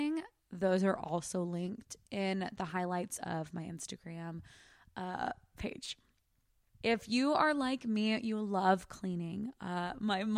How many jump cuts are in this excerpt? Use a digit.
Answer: 1